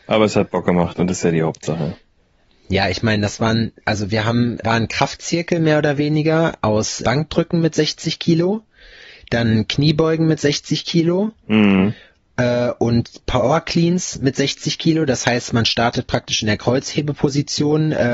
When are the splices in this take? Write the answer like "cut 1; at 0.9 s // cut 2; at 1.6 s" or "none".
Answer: cut 1; at 4.6 s // cut 2; at 7.0 s